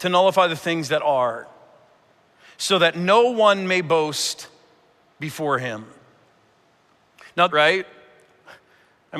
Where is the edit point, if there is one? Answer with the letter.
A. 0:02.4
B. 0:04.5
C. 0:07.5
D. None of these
C